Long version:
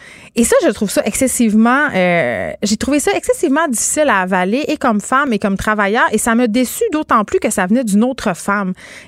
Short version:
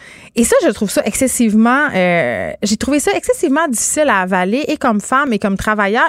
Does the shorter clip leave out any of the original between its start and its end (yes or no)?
no